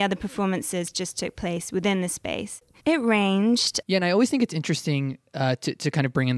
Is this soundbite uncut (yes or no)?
no